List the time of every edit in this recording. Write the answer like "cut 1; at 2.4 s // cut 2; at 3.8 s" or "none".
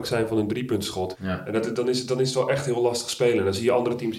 cut 1; at 1.1 s